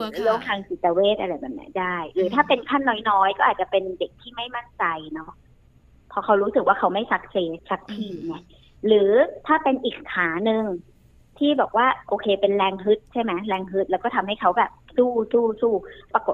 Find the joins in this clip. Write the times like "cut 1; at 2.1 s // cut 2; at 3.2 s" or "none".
none

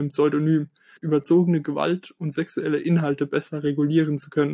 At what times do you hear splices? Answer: cut 1; at 1.0 s

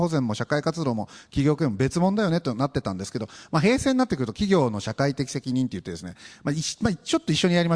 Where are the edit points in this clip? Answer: none

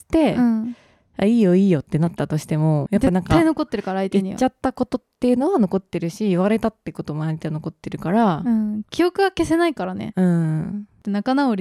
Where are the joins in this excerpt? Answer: cut 1; at 2.9 s

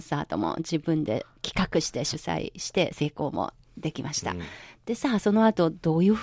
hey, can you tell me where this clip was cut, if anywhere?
none

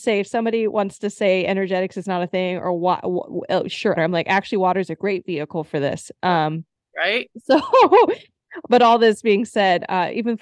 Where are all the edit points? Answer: cut 1; at 4.0 s

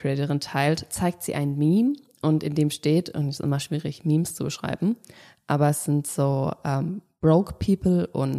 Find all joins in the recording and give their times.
none

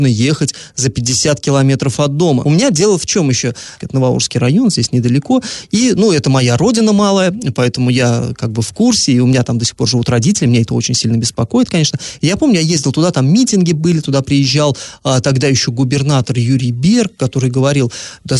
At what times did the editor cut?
cut 1; at 2.4 s // cut 2; at 3.8 s

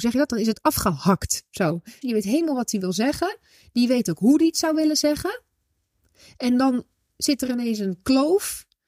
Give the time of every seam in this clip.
cut 1; at 2.0 s

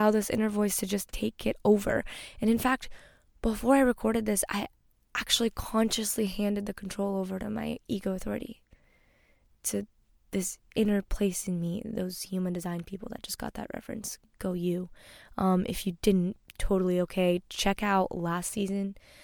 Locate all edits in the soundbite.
none

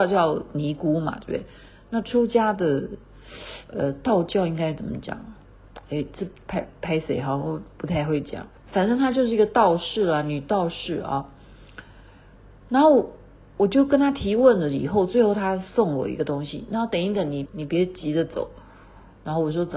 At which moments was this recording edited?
cut 1; at 8.6 s // cut 2; at 17.5 s

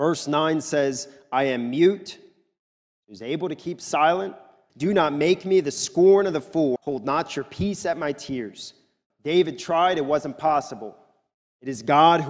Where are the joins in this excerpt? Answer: cut 1; at 4.7 s // cut 2; at 6.8 s // cut 3; at 9.1 s

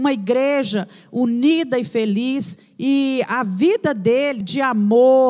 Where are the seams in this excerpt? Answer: cut 1; at 2.8 s // cut 2; at 4.4 s

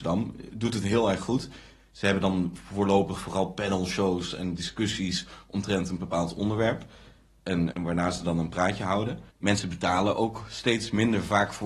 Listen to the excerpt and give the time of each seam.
cut 1; at 7.7 s // cut 2; at 9.3 s

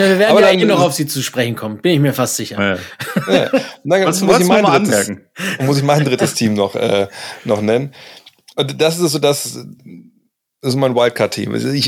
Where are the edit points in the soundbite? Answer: none

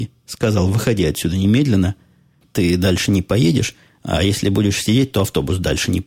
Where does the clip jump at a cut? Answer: none

